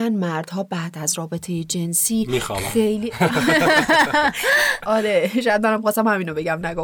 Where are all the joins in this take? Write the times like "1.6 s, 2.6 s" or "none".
none